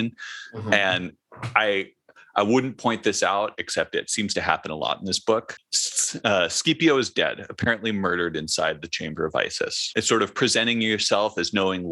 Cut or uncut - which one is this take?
cut